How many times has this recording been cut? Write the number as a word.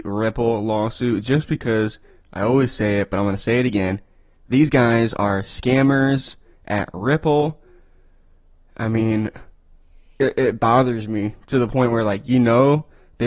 zero